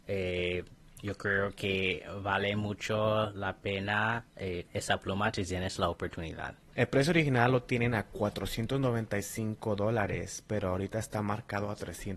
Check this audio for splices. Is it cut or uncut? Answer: cut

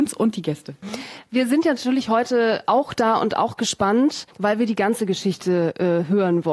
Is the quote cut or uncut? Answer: cut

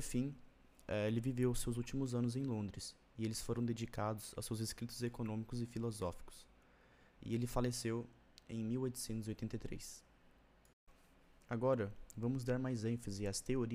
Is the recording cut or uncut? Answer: uncut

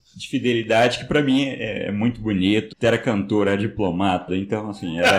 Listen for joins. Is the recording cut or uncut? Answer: cut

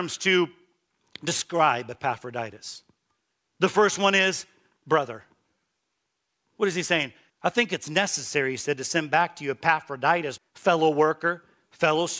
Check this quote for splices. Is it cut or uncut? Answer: cut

